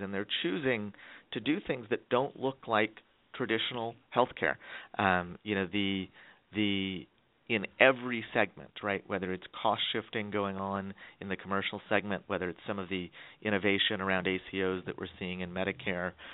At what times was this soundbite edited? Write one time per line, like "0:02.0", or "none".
0:04.9